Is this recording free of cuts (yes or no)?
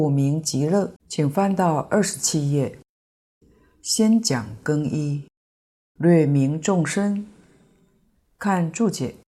no